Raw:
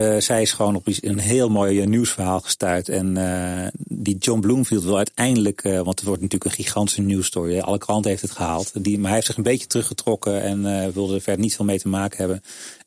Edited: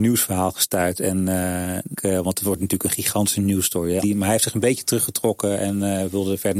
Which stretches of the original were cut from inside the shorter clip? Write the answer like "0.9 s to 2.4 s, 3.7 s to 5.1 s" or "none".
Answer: 3.8 s to 5.6 s, 7.6 s to 8.8 s